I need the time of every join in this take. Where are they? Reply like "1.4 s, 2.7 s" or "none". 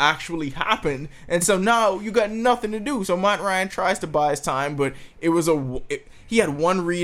none